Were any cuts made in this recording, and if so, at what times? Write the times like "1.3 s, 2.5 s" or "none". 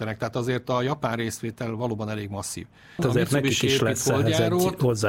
3.0 s